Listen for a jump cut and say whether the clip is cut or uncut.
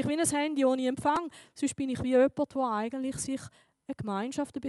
uncut